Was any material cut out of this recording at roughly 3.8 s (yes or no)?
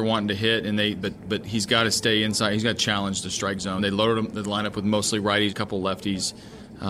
yes